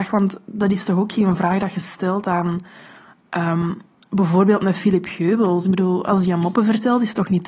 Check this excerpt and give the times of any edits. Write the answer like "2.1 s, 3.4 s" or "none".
none

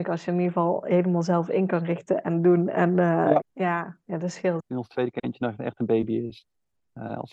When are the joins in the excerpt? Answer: 3.4 s, 4.6 s

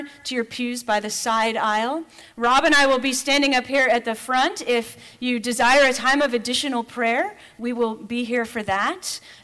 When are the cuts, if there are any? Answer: none

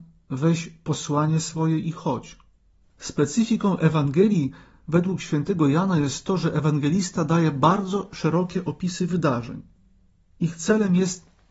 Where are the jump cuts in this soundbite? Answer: 2.8 s

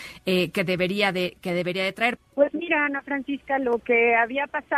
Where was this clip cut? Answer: 2.2 s

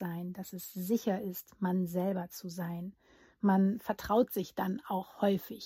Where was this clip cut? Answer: none

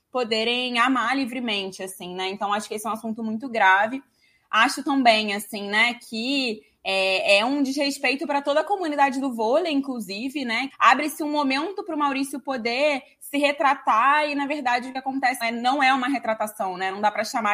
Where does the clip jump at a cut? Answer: 10.7 s, 15.4 s

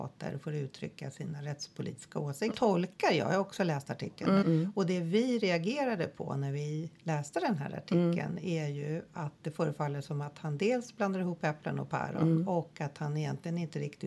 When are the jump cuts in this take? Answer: 2.5 s, 4.4 s

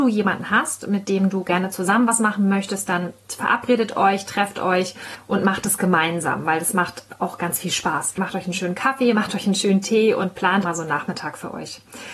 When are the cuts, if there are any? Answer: 8.2 s, 10.6 s

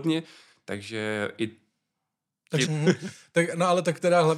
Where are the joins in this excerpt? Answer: 2.7 s

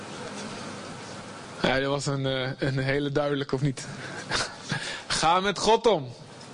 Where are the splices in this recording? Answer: none

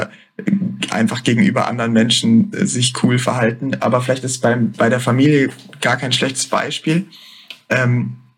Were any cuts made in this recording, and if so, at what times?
none

